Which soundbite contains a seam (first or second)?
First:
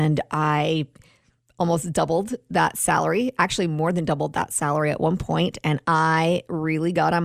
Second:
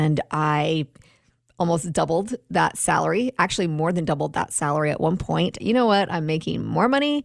second